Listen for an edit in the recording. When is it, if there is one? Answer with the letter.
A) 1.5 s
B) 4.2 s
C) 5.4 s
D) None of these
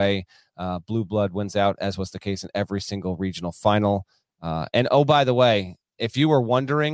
D